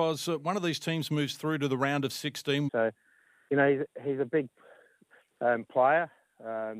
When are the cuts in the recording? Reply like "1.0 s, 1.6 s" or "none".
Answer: 2.7 s